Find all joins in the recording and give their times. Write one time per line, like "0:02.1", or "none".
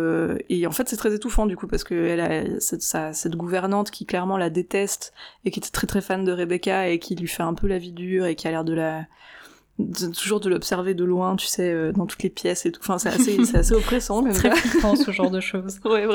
none